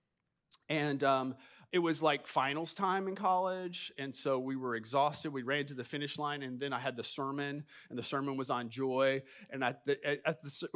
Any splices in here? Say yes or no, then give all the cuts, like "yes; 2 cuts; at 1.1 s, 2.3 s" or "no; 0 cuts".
no; 0 cuts